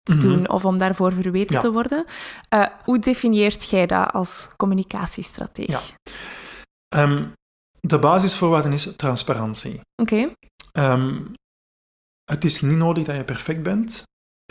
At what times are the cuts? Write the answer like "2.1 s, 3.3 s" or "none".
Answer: 2.8 s